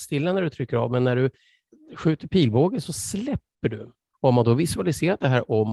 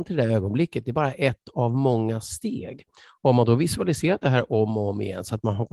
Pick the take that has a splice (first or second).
first